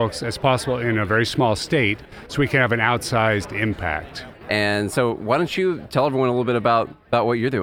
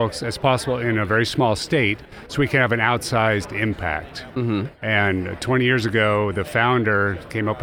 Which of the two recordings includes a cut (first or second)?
first